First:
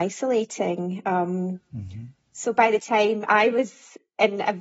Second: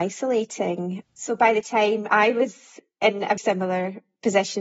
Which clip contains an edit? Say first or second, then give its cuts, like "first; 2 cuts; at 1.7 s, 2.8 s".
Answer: second; 2 cuts; at 1.0 s, 3.4 s